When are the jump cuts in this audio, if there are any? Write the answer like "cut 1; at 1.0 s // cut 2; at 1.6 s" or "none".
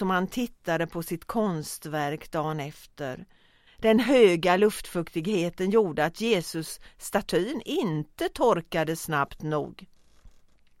cut 1; at 3.7 s